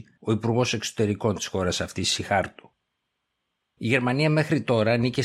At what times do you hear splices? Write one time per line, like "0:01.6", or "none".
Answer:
0:03.8